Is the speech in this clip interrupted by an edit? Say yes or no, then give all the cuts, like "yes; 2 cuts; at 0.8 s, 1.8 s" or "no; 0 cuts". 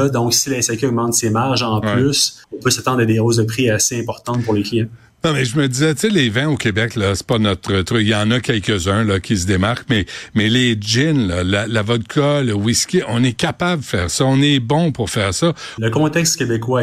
yes; 2 cuts; at 2.4 s, 15.8 s